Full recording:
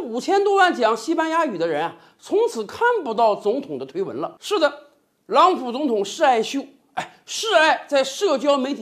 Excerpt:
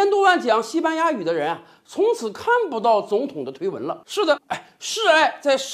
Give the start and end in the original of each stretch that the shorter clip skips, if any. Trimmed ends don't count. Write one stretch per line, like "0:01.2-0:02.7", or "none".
0:04.7-0:06.8